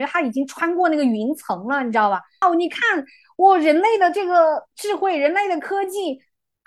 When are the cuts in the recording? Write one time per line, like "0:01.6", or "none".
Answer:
0:02.4
0:04.7